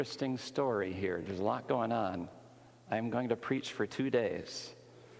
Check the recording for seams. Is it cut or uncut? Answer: uncut